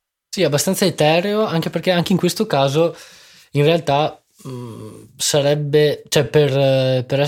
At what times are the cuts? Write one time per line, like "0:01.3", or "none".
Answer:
none